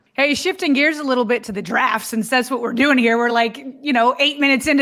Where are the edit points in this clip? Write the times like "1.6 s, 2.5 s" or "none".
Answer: none